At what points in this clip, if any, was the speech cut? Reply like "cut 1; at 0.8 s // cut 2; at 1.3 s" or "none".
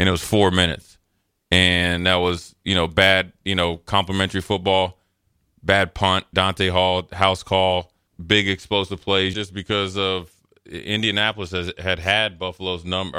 cut 1; at 6.3 s // cut 2; at 8.1 s // cut 3; at 9.3 s